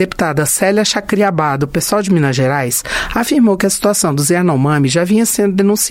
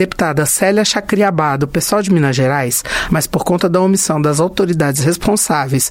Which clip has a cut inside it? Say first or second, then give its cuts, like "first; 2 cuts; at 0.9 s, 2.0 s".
second; 1 cut; at 3.1 s